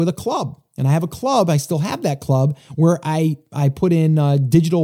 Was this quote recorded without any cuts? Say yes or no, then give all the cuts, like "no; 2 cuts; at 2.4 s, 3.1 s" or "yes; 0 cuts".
yes; 0 cuts